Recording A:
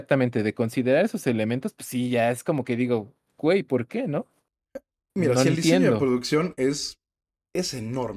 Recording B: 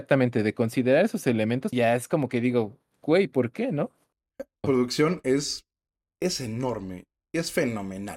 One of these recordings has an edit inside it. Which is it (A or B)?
B